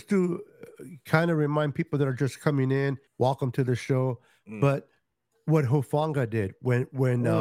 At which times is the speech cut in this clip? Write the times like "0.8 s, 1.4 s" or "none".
3.1 s